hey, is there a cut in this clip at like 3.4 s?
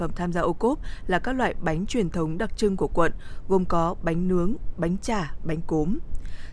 no; 1 cut; at 4.7 s

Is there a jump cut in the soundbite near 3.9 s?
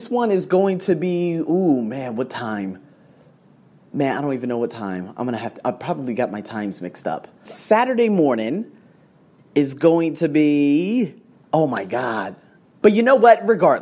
no; 2 cuts; at 7.5 s, 12.8 s

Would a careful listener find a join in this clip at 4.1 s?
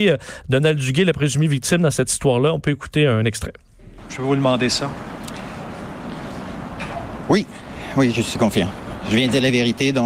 yes; 1 cut; at 4.1 s

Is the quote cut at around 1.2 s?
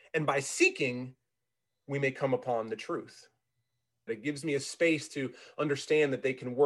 no; 1 cut; at 4.1 s

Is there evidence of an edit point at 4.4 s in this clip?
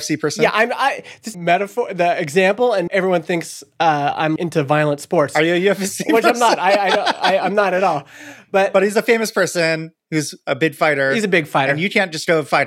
yes; 3 cuts; at 1.3 s, 2.9 s, 4.4 s

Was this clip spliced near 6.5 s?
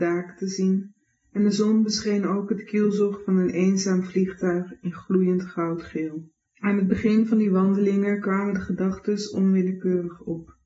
yes; 1 cut; at 6.5 s

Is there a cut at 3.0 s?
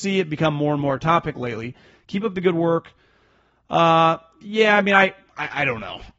no; 0 cuts

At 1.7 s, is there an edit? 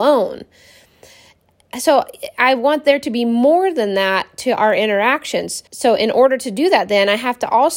no; 1 cut; at 5.7 s

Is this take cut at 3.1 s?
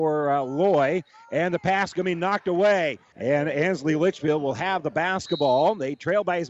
yes; 1 cut; at 3.1 s

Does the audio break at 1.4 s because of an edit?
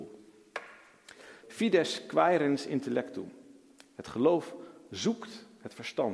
yes; 1 cut; at 1.4 s

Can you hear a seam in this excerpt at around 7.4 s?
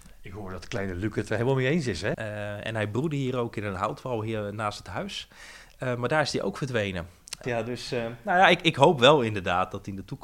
yes; 2 cuts; at 2.1 s, 7.4 s

